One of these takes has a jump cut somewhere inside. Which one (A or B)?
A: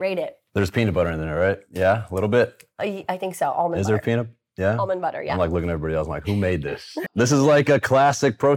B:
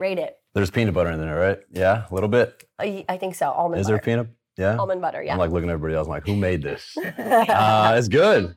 A